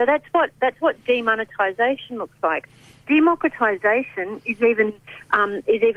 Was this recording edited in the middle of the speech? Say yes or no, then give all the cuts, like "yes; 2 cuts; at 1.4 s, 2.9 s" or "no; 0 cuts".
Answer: no; 0 cuts